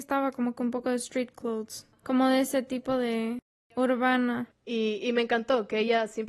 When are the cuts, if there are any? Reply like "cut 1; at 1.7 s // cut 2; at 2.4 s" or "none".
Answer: cut 1; at 5.0 s

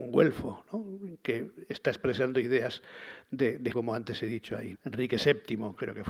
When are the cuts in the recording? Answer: cut 1; at 3.7 s // cut 2; at 4.7 s

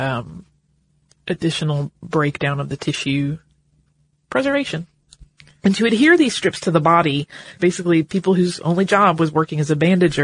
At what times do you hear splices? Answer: cut 1; at 5.6 s // cut 2; at 7.6 s

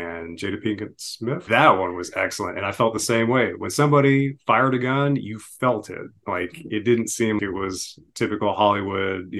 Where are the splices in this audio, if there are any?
cut 1; at 1.5 s // cut 2; at 7.4 s

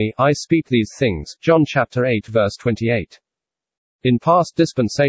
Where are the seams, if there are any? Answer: cut 1; at 3.9 s

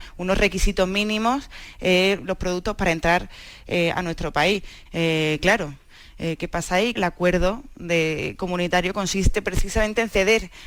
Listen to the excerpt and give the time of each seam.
cut 1; at 4.9 s // cut 2; at 7.0 s

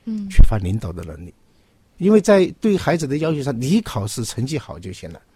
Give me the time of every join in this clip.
none

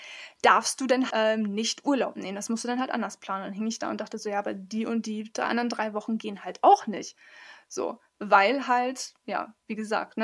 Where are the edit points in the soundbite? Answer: cut 1; at 1.1 s

